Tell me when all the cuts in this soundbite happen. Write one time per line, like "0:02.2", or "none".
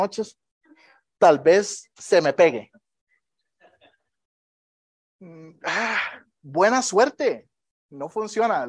none